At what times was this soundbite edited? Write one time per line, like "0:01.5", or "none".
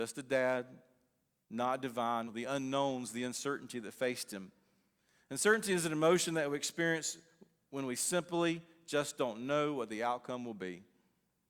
0:02.3